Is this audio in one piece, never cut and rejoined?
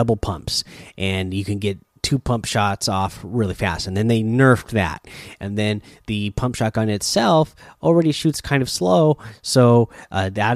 yes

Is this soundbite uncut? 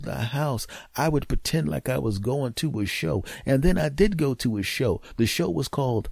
yes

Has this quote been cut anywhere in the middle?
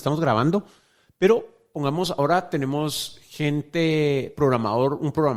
no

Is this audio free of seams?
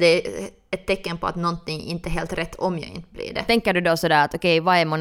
yes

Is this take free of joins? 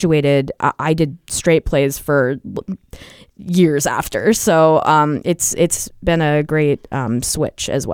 yes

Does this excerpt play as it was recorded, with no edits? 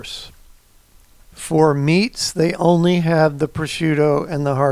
yes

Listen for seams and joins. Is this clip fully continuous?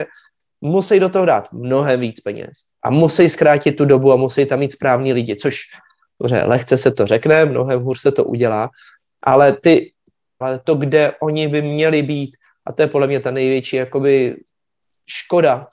no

